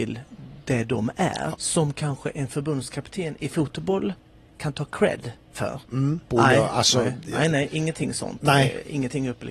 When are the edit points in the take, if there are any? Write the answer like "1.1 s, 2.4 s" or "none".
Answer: 1.5 s, 6.3 s